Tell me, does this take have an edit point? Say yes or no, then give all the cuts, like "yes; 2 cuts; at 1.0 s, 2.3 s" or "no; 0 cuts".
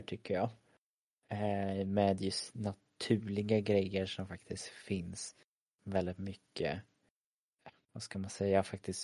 no; 0 cuts